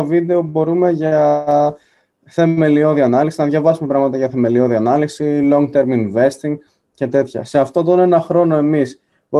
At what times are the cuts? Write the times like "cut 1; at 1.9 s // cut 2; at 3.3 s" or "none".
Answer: none

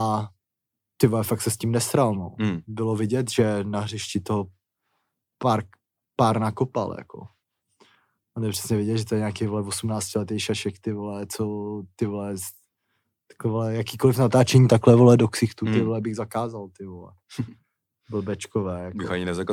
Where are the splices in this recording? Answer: none

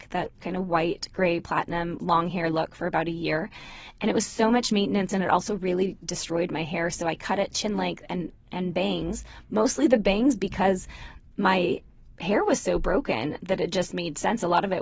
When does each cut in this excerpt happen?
none

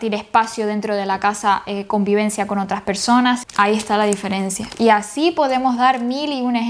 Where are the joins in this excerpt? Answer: cut 1; at 3.4 s

